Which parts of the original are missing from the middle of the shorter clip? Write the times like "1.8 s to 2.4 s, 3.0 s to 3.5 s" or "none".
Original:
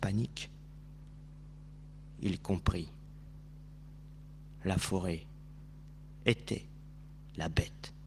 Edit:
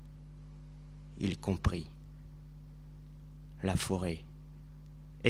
none